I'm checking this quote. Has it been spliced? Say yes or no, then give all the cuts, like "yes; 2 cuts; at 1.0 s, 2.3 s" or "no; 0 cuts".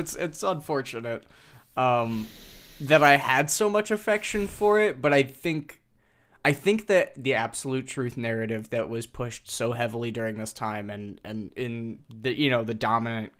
no; 0 cuts